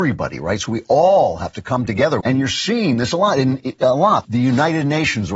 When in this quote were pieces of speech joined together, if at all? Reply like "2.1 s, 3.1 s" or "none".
2.2 s, 4.2 s